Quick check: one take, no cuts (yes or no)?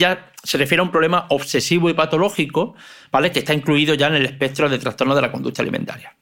yes